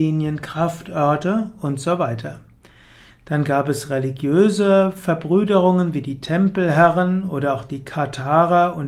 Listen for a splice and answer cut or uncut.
uncut